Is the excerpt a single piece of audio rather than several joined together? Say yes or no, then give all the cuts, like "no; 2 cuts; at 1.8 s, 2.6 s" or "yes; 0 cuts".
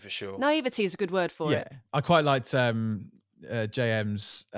yes; 0 cuts